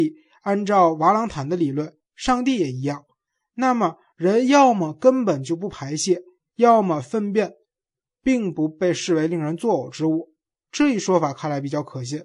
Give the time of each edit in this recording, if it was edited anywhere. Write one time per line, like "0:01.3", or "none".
none